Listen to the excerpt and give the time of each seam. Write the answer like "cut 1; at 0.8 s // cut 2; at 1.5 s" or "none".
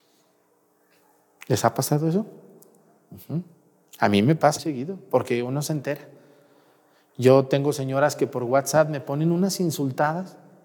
cut 1; at 4.6 s